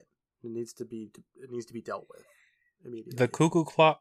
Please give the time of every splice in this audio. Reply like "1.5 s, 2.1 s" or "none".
none